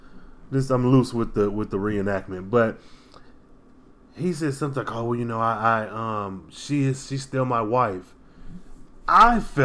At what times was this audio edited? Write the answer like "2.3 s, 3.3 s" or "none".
none